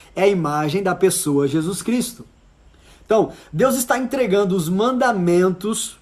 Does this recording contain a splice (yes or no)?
no